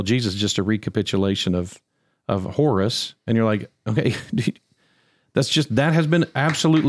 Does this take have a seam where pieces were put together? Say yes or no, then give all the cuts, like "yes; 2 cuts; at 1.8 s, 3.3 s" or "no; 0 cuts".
no; 0 cuts